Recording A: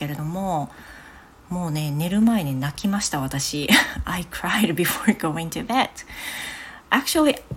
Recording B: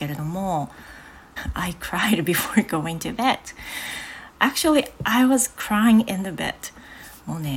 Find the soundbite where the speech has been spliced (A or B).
B